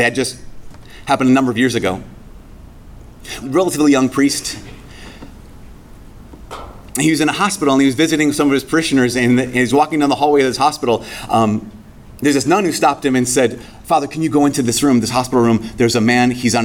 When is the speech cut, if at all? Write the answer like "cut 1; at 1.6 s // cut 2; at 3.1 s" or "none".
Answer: cut 1; at 3.4 s

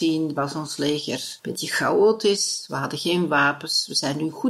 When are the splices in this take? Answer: cut 1; at 1.4 s

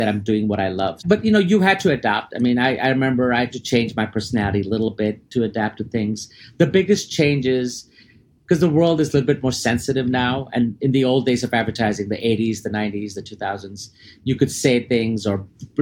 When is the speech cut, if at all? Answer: none

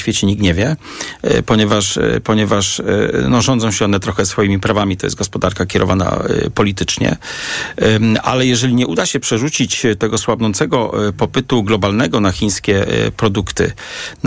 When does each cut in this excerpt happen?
none

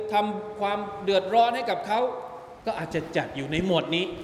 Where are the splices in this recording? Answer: cut 1; at 2.6 s

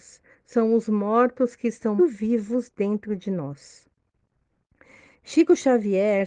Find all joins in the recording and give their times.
cut 1; at 2.0 s

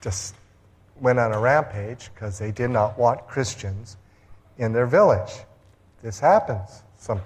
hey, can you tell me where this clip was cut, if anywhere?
none

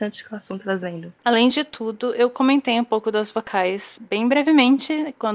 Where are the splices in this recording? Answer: none

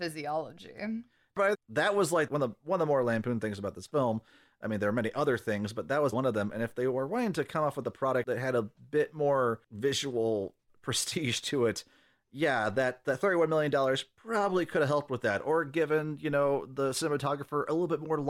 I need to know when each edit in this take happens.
cut 1; at 6.1 s

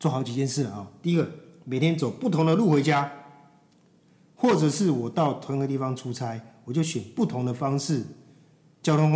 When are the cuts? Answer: none

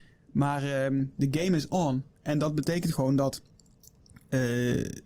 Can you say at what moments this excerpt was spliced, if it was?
none

